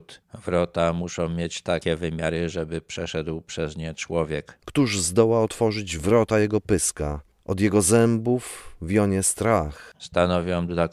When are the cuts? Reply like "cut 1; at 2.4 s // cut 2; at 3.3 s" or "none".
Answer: cut 1; at 4.6 s // cut 2; at 9.9 s